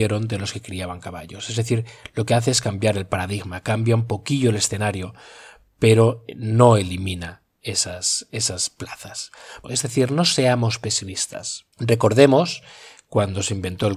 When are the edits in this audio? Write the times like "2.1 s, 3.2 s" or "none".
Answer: 9.6 s, 11.7 s

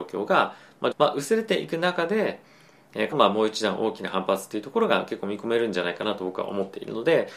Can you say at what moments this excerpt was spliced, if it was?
0.9 s, 3.1 s

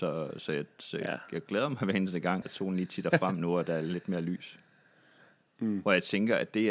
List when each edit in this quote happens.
2.4 s, 5.5 s

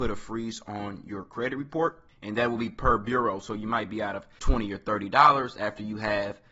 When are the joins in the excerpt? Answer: 4.4 s

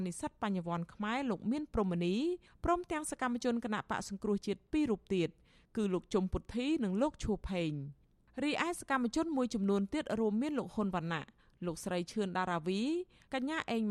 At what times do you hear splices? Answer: none

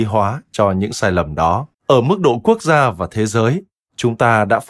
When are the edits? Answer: 1.7 s

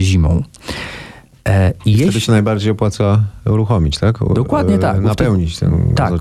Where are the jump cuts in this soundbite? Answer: none

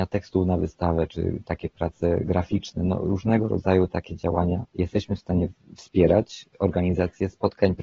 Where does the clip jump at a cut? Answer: 1.1 s, 4.7 s

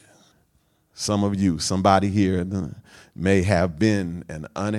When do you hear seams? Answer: none

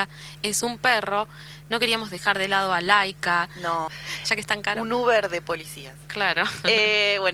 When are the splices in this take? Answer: 3.9 s

